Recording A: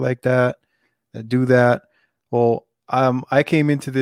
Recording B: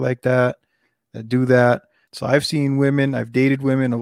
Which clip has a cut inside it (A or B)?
B